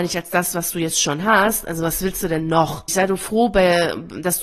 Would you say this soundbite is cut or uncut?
cut